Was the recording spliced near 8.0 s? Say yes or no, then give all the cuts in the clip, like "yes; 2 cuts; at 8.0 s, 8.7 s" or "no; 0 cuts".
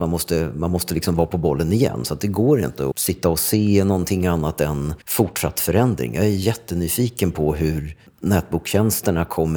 no; 2 cuts; at 2.9 s, 5.0 s